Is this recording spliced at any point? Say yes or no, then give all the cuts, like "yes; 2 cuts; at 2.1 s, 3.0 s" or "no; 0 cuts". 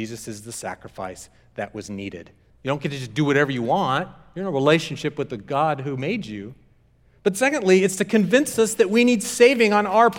yes; 1 cut; at 2.5 s